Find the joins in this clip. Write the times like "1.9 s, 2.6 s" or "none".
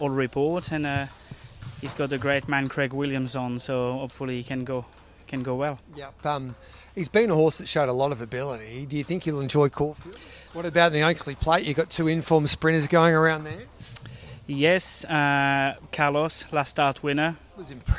10.5 s